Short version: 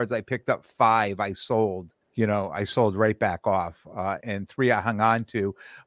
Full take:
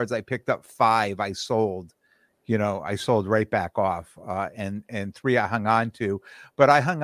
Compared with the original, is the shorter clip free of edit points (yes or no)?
no